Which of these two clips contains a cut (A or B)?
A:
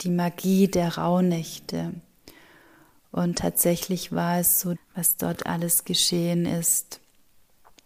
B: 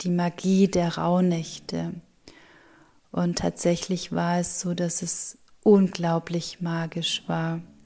A